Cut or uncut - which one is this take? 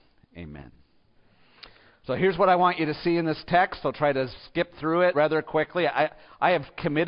cut